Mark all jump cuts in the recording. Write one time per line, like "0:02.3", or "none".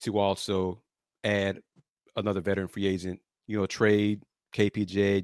none